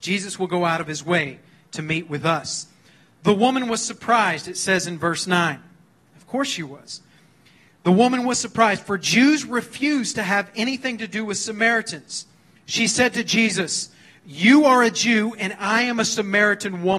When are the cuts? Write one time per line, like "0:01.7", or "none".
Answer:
none